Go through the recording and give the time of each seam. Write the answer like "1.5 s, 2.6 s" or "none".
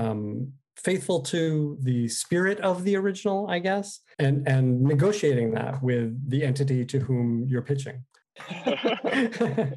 4.1 s, 8.2 s